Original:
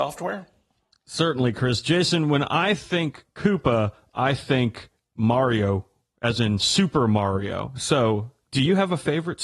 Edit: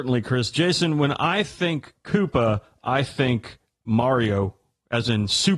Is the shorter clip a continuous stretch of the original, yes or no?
yes